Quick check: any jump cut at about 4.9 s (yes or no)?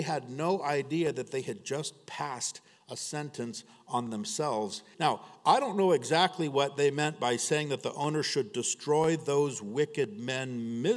yes